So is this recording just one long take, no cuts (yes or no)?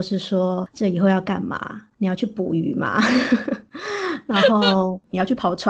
yes